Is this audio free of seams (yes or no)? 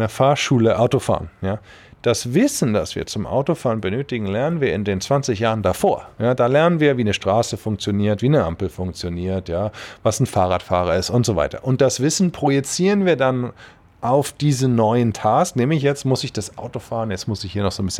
yes